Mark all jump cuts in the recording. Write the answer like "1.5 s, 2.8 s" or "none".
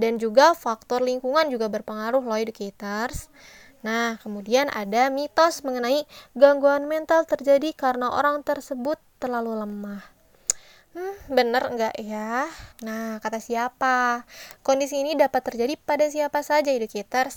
12.7 s, 14.6 s